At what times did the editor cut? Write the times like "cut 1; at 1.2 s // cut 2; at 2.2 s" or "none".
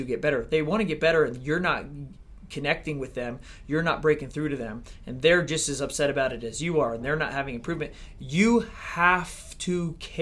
none